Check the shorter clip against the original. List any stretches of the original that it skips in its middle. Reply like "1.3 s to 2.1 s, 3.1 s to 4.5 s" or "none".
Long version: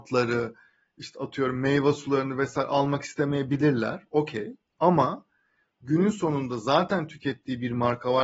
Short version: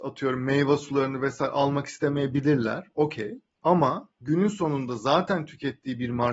5.3 s to 5.7 s